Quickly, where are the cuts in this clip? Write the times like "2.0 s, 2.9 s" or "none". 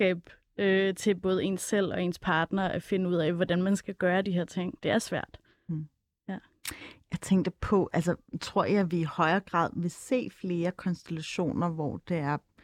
4.8 s

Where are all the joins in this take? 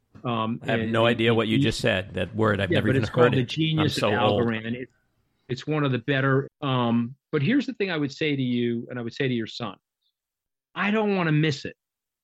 6.4 s

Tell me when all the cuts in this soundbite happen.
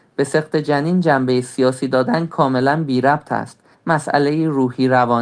3.7 s

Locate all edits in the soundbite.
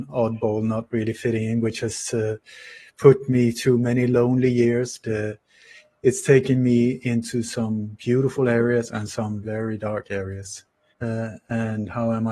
5.0 s, 9.4 s, 10.9 s

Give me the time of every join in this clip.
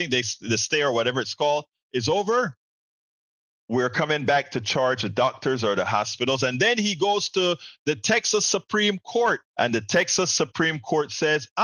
9.5 s

